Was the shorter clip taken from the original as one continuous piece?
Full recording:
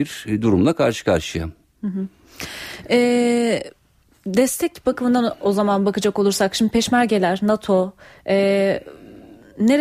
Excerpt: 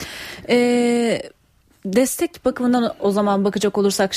yes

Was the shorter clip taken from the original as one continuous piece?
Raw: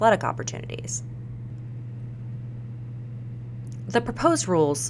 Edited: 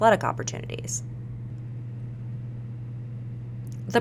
yes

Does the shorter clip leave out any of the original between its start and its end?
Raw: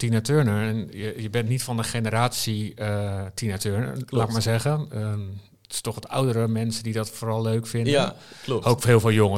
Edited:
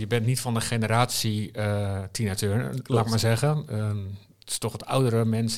no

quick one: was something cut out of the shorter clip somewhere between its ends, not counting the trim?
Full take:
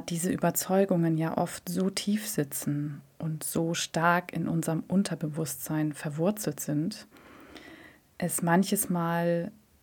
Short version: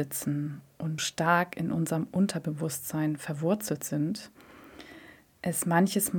yes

